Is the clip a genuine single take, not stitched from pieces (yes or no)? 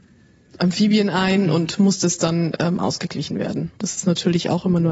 no